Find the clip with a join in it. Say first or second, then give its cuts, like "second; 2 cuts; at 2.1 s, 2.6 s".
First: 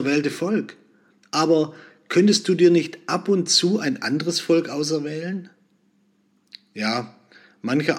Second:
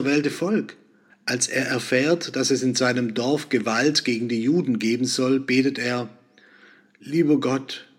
second; 1 cut; at 1.1 s